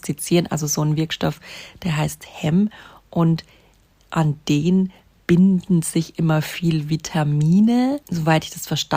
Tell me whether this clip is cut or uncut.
cut